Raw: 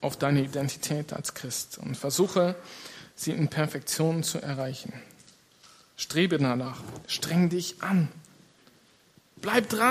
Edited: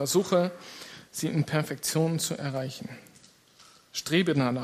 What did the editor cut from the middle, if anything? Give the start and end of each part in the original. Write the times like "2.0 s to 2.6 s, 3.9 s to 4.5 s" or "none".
none